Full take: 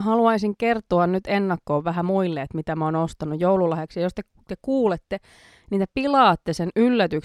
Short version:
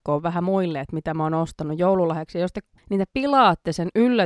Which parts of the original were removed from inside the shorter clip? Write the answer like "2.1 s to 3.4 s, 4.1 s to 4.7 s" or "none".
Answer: 4.4 s to 5.6 s